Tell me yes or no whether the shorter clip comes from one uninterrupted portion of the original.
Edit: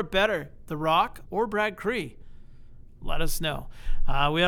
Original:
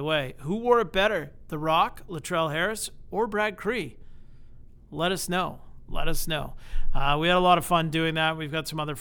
no